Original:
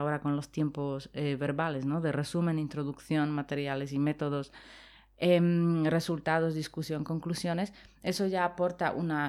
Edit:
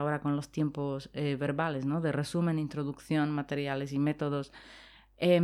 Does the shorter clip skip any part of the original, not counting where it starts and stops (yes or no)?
no